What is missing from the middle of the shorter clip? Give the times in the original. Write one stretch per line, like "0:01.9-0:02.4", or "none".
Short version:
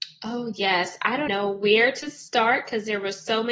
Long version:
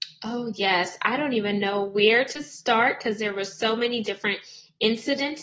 0:01.3-0:01.6

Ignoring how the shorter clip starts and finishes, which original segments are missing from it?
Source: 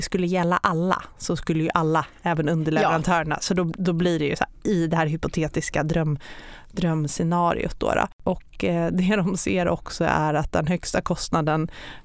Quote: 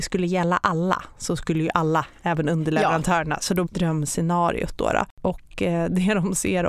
0:03.7-0:06.7

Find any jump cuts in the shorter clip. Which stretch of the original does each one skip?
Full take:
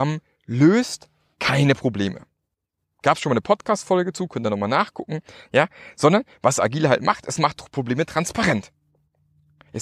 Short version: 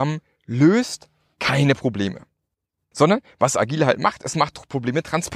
0:02.9-0:05.9

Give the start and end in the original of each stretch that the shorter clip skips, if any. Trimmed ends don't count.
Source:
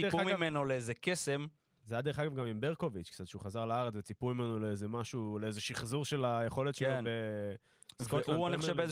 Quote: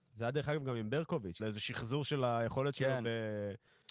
0:03.1-0:05.4

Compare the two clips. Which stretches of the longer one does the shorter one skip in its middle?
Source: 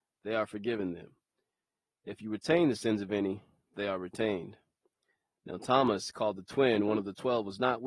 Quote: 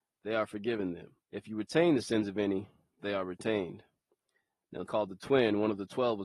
0:01.2-0:02.0
0:05.6-0:06.1

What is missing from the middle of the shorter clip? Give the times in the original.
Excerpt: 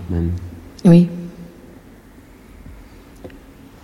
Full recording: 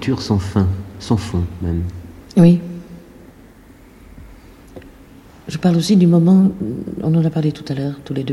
none

